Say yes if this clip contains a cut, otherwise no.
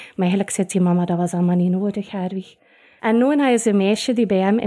yes